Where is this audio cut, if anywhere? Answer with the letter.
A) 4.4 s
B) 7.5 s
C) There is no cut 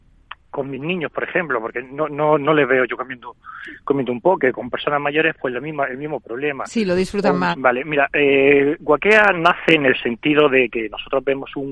B